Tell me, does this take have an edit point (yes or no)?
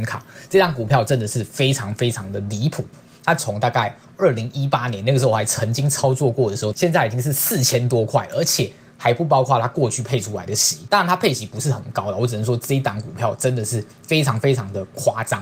yes